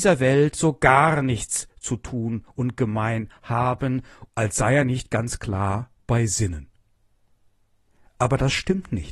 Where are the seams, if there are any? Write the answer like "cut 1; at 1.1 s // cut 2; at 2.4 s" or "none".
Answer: cut 1; at 4.3 s